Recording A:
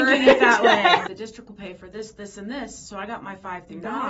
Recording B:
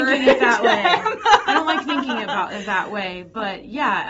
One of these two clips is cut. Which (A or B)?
A